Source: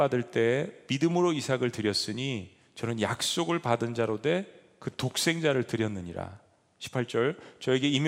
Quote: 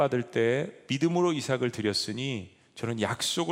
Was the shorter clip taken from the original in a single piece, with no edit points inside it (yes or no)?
yes